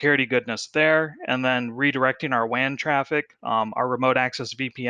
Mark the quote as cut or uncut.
uncut